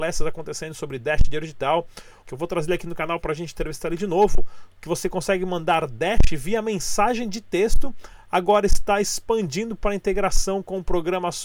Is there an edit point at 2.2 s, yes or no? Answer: yes